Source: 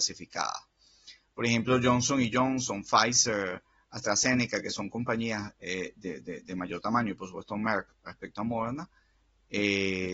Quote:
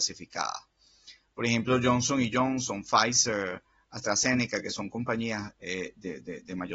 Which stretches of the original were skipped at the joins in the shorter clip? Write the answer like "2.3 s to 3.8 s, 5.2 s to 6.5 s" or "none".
none